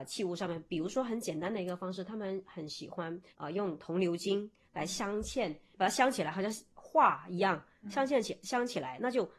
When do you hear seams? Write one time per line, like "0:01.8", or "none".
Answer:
0:03.3